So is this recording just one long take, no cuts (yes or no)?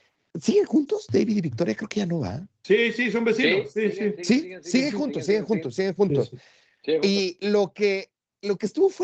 yes